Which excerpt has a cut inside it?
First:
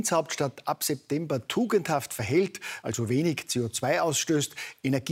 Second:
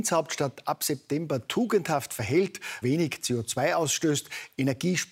second; 1 cut; at 2.8 s

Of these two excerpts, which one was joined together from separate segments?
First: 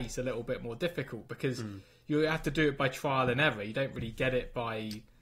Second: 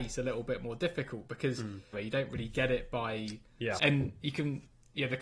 second; 2 cuts; at 1.9 s, 3.8 s

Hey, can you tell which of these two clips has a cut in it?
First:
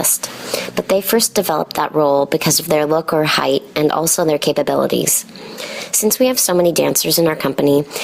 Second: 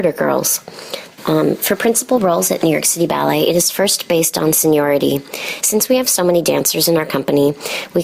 second; 2 cuts; at 1.2 s, 5.6 s

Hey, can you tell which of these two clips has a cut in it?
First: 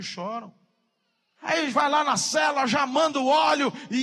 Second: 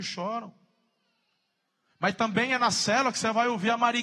first; 1 cut; at 1.4 s

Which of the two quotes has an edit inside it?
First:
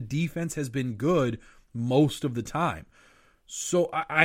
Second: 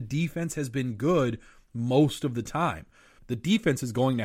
second; 1 cut; at 3.2 s

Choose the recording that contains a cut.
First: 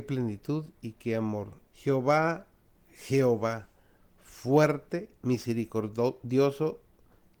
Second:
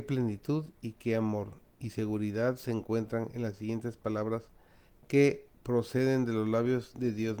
first; 2 cuts; at 1.7 s, 5.2 s

